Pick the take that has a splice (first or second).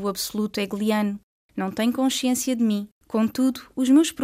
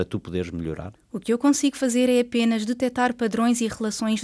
first